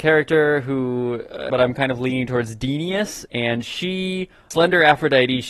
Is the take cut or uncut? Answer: cut